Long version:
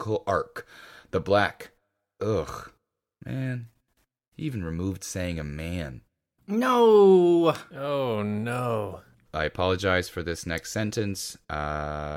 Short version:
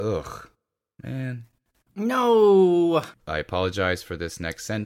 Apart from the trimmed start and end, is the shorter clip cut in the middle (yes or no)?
yes